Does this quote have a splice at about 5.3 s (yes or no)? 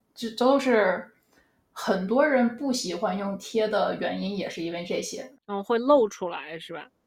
yes